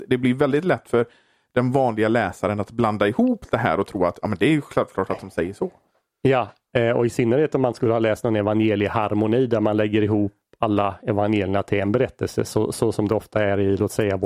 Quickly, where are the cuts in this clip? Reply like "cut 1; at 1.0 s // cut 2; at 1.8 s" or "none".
none